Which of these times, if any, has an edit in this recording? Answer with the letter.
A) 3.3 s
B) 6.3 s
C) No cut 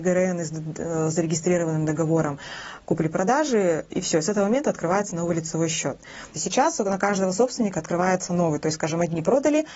B